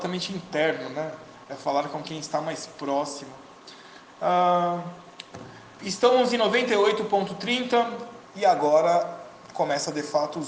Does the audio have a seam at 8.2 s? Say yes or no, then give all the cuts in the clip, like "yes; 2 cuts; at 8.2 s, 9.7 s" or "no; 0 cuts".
yes; 1 cut; at 8.2 s